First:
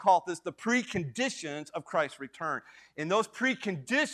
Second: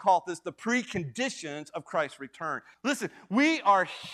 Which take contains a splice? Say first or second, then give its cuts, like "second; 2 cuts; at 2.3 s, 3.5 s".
second; 1 cut; at 2.7 s